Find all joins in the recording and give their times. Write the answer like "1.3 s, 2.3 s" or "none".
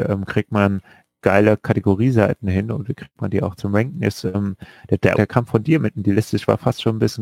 5.2 s